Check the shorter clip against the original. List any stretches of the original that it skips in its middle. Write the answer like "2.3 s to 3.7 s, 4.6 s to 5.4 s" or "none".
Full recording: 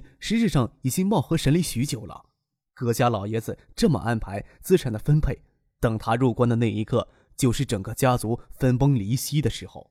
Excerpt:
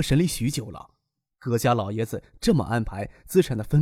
none